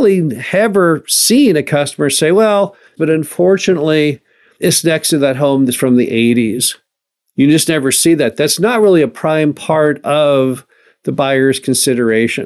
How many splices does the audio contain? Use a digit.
1